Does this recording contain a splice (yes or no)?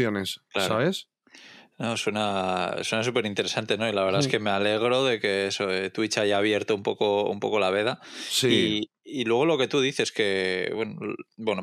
no